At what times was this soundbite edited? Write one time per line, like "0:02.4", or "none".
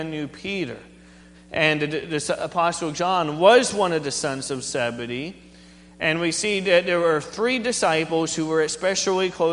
0:01.3